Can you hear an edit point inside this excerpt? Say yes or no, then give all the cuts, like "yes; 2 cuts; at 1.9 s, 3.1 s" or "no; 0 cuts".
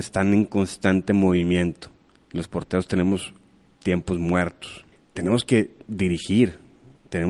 yes; 1 cut; at 4.9 s